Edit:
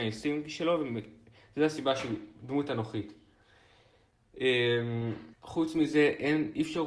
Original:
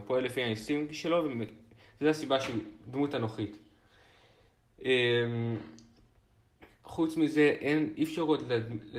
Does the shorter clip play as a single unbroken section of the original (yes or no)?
no